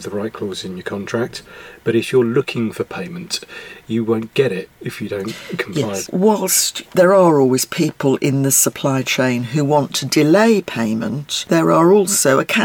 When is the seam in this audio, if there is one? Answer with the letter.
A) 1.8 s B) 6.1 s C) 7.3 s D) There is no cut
B